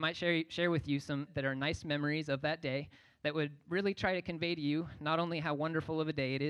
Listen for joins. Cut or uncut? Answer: cut